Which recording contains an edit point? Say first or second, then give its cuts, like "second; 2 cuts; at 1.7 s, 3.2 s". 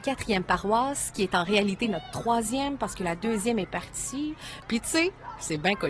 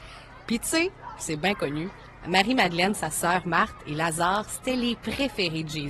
first; 1 cut; at 4.6 s